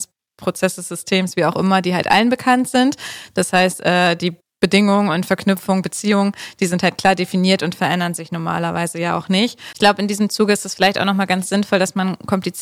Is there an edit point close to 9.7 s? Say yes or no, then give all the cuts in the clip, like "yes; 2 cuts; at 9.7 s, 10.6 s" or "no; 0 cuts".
yes; 1 cut; at 9.7 s